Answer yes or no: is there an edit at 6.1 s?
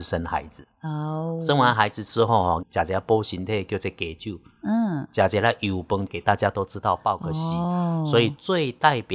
yes